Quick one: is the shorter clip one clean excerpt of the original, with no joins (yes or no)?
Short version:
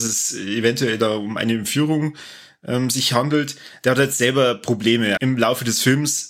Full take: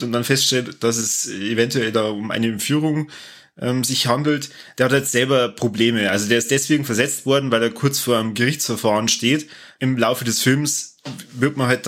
no